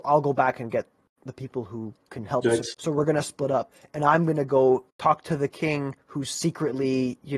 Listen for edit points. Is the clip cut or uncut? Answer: cut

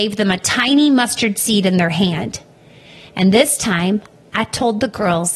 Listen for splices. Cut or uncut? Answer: uncut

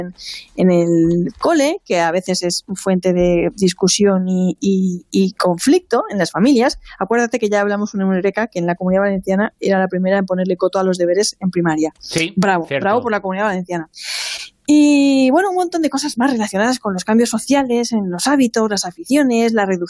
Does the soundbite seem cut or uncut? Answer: uncut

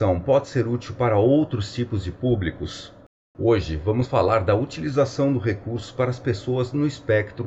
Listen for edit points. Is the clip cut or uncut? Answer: uncut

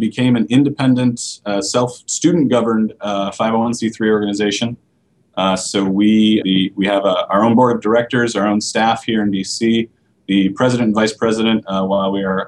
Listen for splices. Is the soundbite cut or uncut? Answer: cut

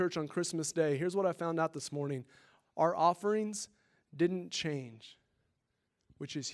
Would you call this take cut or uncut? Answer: uncut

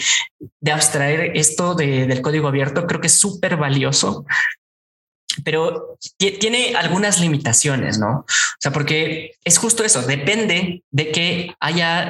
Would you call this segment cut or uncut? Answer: uncut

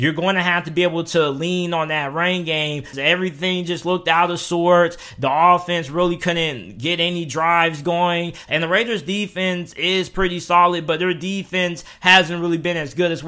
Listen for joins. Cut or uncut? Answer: cut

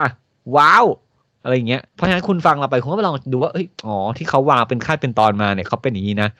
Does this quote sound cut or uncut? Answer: cut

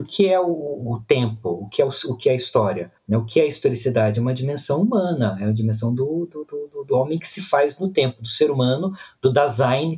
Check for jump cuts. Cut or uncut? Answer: uncut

